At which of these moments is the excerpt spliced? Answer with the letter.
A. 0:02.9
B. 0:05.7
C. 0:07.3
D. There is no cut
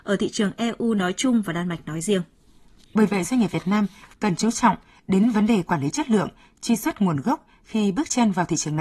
A